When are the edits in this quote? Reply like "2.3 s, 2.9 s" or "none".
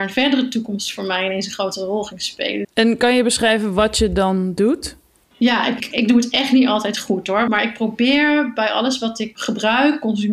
2.6 s, 5.9 s